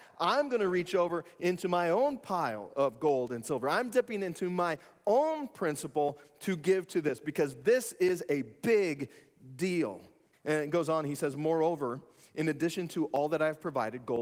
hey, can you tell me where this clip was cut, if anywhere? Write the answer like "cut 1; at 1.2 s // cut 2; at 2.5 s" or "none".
cut 1; at 10.3 s